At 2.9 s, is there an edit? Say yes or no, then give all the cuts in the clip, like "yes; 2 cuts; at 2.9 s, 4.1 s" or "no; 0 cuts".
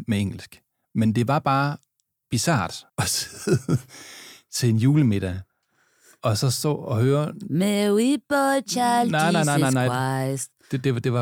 yes; 1 cut; at 2.9 s